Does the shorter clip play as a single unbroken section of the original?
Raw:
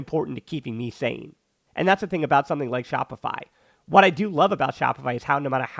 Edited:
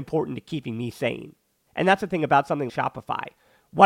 no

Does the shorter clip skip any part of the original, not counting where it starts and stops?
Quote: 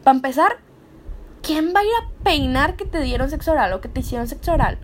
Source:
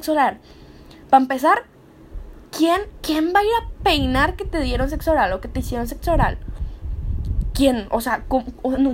yes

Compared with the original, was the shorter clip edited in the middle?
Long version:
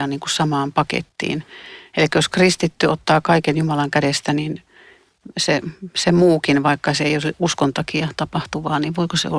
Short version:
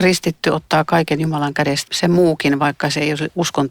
yes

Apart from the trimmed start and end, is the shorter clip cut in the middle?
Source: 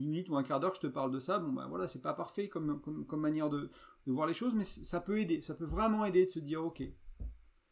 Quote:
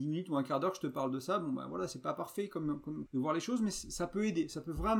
yes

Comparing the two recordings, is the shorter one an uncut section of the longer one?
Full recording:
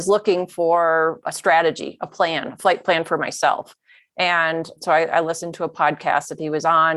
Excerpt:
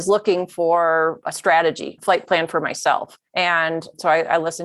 no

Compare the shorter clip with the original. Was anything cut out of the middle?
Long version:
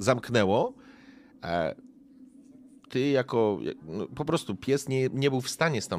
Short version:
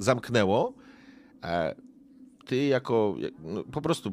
yes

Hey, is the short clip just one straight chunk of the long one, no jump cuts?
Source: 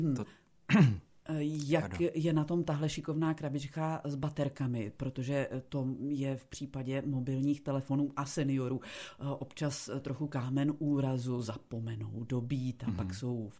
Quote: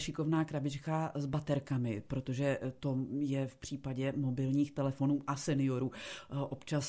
yes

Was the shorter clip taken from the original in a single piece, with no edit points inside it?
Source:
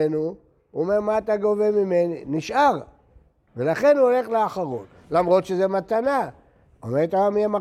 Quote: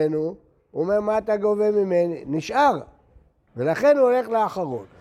yes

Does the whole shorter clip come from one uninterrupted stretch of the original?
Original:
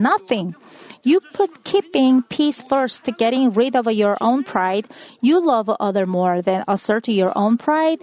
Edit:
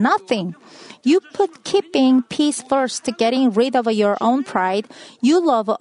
yes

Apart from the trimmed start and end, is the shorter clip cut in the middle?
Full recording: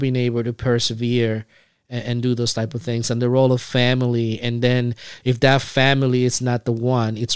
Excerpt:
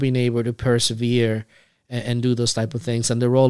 no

